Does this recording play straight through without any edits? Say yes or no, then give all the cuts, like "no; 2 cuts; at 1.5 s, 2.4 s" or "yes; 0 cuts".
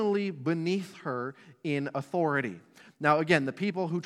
yes; 0 cuts